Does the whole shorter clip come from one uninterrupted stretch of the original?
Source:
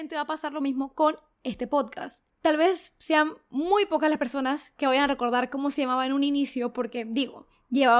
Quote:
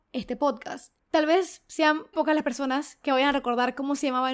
no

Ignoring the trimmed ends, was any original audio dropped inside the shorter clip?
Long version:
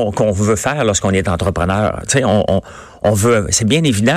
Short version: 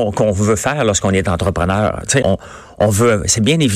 yes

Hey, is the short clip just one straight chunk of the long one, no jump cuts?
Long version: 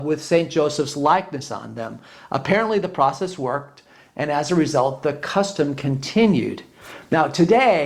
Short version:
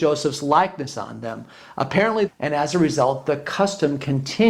no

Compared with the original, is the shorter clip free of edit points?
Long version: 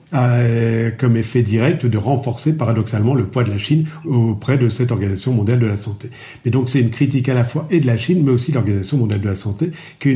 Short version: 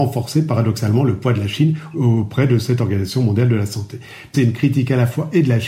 no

